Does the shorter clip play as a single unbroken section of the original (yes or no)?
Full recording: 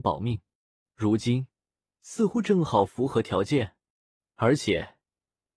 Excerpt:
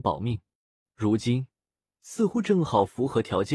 yes